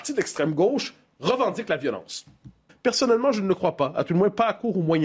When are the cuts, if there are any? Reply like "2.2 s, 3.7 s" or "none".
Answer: 2.7 s

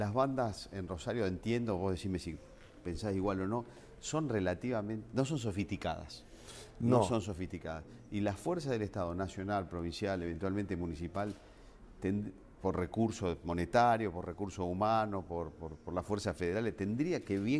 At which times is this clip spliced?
none

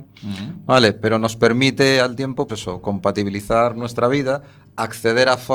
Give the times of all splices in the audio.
2.5 s

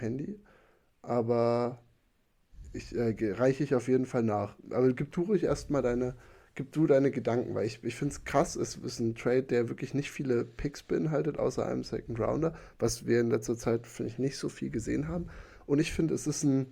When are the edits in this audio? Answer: none

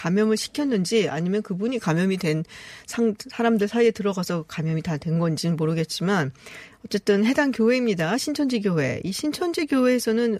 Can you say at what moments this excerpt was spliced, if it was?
none

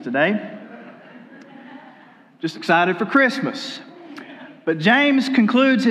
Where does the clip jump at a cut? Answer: none

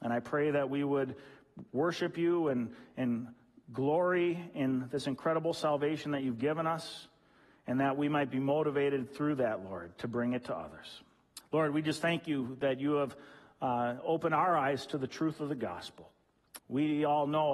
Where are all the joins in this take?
11.4 s, 16.6 s

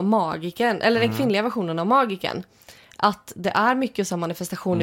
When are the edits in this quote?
none

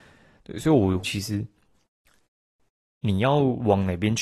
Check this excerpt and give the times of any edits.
1.0 s

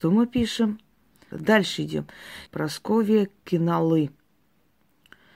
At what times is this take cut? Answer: 1.3 s, 2.5 s

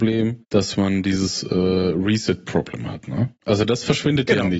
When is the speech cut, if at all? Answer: none

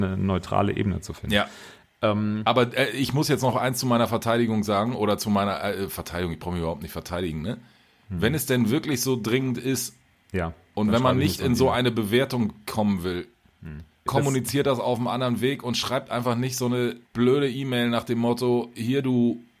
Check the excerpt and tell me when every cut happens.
14.1 s, 17.0 s

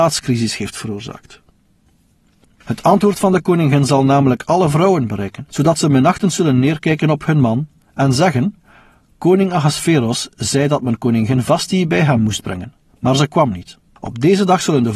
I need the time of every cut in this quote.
2.4 s

